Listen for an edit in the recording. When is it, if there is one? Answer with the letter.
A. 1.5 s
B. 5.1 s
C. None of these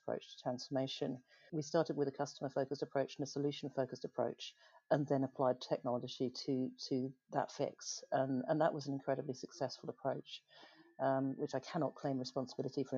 A